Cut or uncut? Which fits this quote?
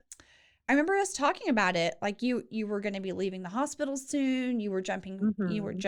uncut